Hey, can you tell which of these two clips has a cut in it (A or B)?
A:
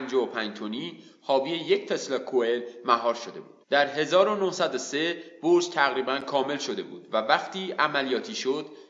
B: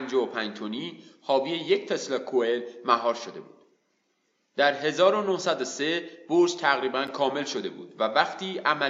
A